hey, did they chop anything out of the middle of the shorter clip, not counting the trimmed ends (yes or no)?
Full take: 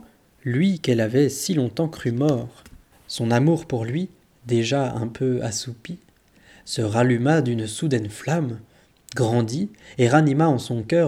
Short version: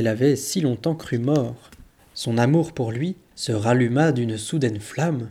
yes